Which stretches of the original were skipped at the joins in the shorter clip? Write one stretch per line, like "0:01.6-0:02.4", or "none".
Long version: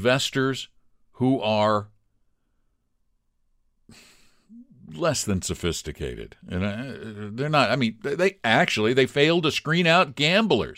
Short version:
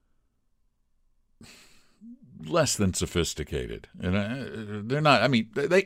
none